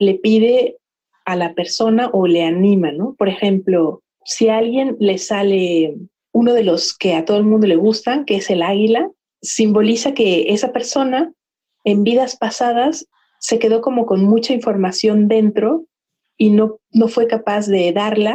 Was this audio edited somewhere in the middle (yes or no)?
no